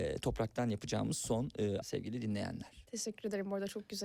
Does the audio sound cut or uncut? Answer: cut